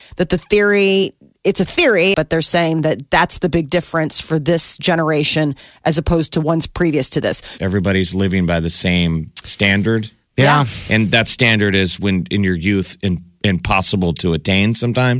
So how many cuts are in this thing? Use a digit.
2